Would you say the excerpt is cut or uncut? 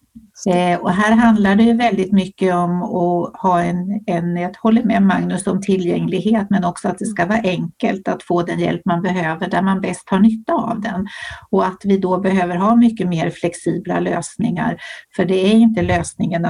uncut